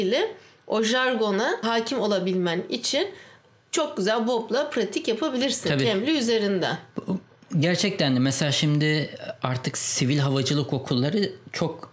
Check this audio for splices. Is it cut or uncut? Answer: uncut